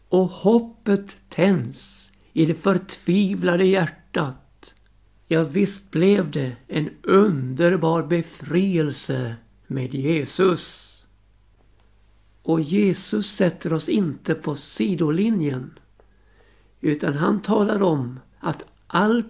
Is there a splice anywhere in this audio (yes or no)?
yes